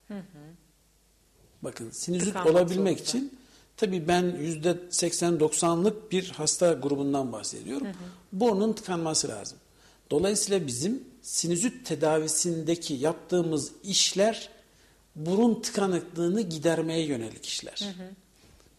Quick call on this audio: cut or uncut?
uncut